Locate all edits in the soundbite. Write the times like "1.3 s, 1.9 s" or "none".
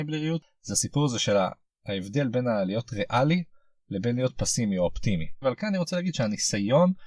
5.4 s

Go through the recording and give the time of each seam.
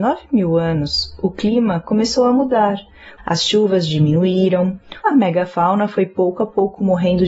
3.2 s, 5.0 s

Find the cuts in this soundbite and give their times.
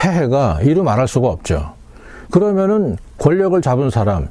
none

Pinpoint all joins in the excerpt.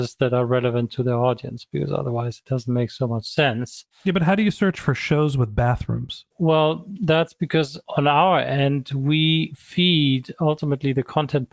6.3 s

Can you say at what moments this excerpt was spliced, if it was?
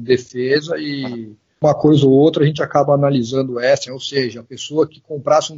3.9 s

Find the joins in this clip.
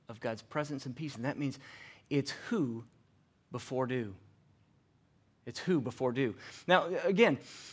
none

